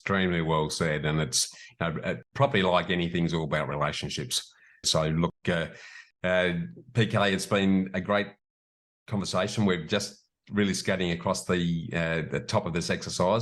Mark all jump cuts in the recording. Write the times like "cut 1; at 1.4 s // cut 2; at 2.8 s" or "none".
cut 1; at 4.8 s

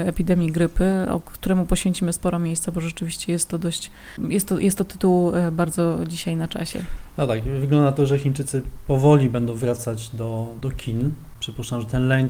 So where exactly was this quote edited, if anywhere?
none

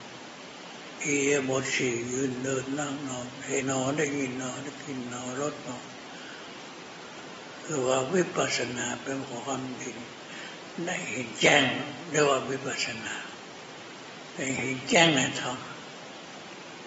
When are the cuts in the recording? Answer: cut 1; at 3.6 s

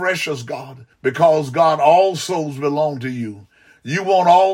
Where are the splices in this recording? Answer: cut 1; at 0.9 s

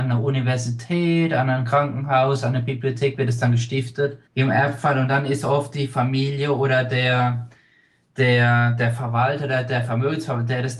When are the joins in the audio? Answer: cut 1; at 4.3 s

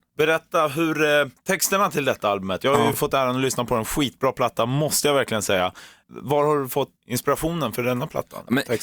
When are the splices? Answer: none

